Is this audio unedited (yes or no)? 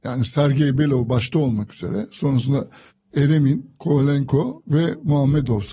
no